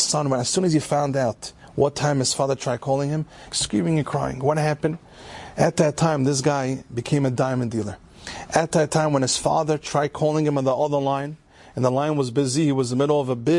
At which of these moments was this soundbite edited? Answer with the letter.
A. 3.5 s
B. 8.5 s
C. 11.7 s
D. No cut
A